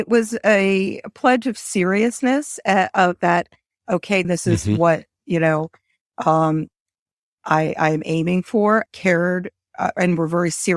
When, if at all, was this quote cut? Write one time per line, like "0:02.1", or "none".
0:04.2
0:08.9